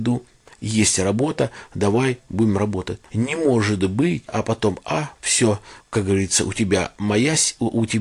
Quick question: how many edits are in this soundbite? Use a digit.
3